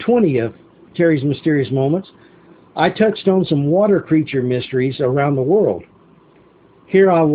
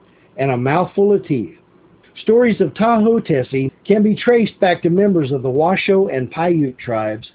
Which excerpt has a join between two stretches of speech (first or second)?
second